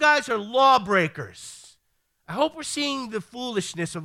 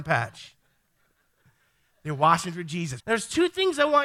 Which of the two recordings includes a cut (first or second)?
second